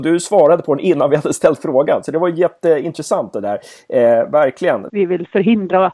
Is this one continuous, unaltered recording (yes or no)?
no